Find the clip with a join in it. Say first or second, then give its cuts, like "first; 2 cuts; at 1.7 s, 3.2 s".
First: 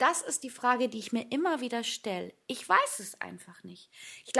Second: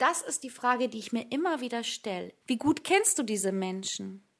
second; 1 cut; at 2.4 s